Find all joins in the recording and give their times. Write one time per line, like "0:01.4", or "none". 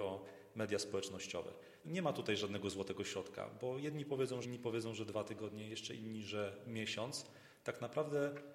0:01.8
0:04.4